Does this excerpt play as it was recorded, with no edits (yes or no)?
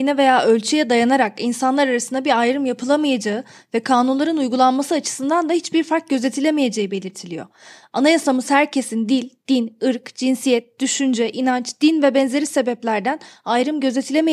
yes